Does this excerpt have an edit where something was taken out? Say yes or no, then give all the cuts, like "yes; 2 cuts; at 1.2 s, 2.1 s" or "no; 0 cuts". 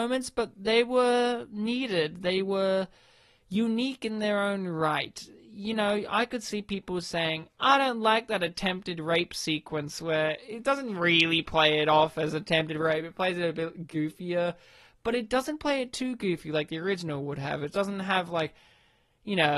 no; 0 cuts